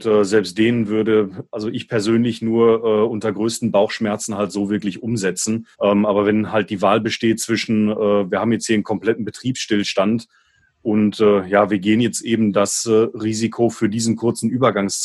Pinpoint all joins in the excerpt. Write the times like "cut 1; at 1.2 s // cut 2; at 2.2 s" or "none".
cut 1; at 5.7 s

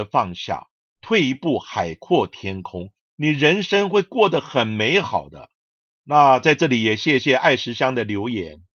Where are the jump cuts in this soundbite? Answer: none

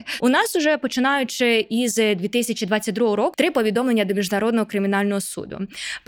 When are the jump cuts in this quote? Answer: cut 1; at 3.3 s

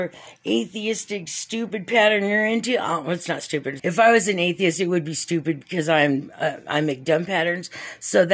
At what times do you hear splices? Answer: cut 1; at 3.8 s

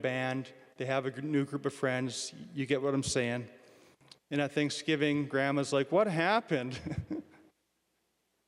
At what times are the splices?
none

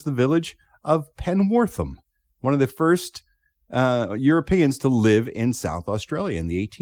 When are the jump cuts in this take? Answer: none

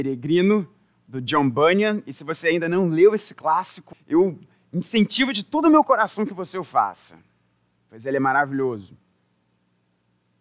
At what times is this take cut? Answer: cut 1; at 3.9 s

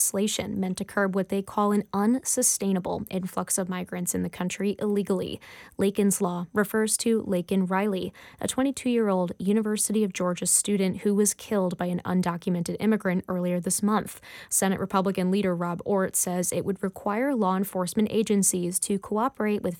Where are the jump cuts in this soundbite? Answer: cut 1; at 14.5 s

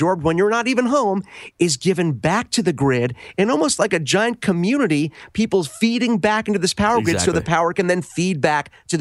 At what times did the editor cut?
none

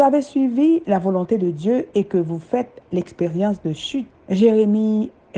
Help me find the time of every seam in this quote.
cut 1; at 4.1 s

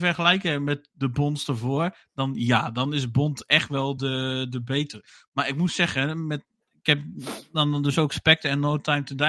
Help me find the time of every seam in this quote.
none

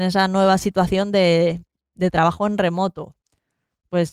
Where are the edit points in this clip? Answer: none

